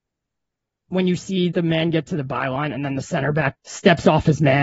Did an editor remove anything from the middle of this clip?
yes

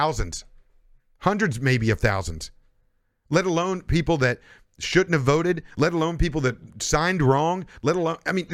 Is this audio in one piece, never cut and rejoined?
yes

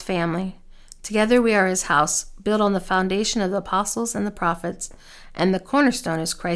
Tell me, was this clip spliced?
no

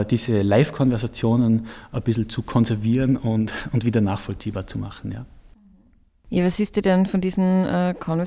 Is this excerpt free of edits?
yes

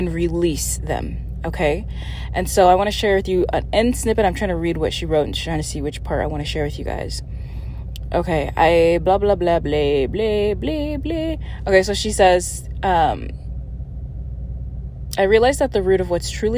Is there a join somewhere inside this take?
no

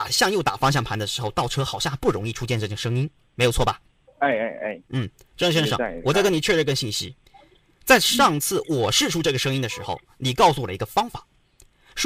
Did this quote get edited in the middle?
yes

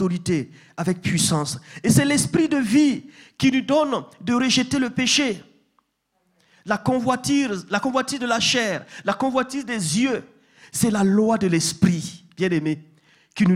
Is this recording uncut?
yes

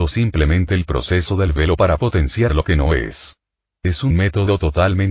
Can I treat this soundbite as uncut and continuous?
yes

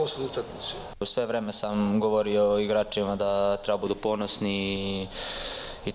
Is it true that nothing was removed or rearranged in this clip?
yes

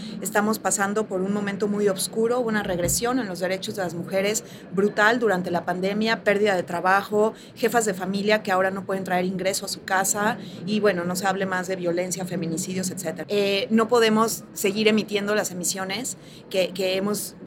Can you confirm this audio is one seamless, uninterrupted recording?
no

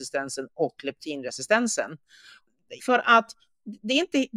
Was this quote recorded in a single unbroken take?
no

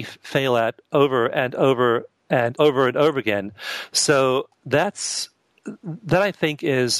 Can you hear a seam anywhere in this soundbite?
yes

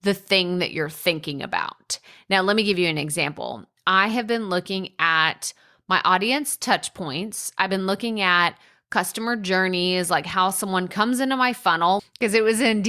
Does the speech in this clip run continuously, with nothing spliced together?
no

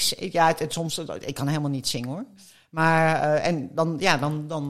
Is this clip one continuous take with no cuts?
yes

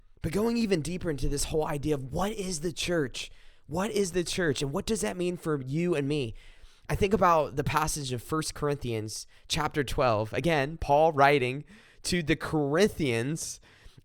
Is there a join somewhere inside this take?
no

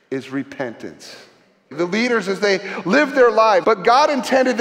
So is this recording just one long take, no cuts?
no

